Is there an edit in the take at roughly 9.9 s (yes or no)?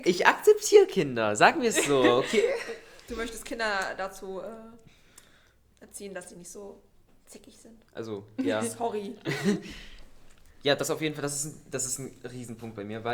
no